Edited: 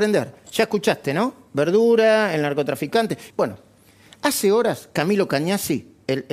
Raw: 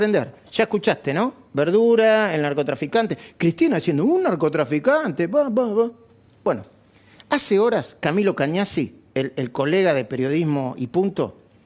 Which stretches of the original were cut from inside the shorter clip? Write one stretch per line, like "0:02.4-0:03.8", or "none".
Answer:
0:03.3-0:06.4